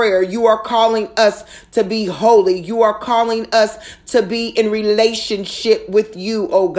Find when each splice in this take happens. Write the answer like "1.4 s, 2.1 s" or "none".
none